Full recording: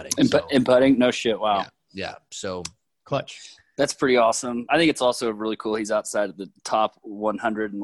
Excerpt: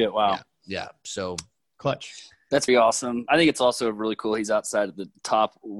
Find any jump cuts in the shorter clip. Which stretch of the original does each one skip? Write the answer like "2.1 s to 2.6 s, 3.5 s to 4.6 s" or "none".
3.9 s to 4.1 s